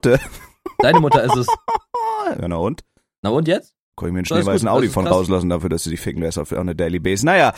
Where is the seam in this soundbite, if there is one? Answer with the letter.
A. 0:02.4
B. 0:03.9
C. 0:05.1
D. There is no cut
D